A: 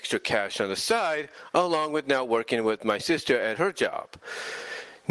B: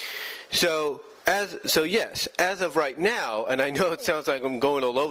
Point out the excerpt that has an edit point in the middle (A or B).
B